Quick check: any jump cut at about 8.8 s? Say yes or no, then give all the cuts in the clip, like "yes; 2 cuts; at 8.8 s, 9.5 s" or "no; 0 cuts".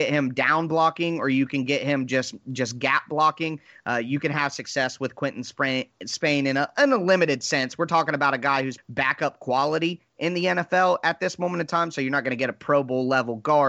yes; 1 cut; at 8.8 s